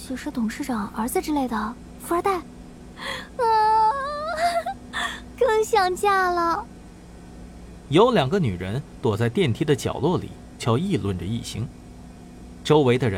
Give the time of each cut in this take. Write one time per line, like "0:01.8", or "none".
0:10.6